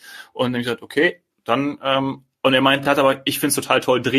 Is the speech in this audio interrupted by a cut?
no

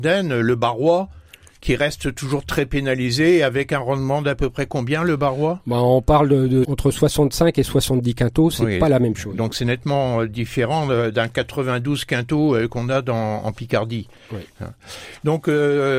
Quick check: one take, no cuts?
no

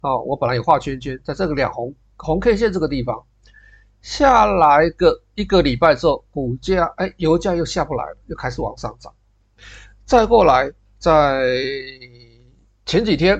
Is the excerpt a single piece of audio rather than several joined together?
yes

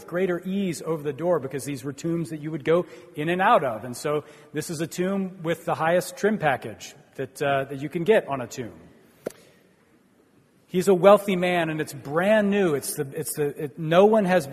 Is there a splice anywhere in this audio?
no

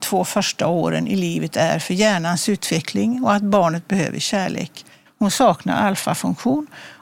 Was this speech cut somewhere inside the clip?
yes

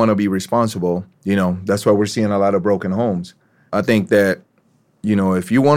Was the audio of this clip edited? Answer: yes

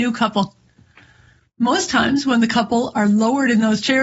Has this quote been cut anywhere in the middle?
no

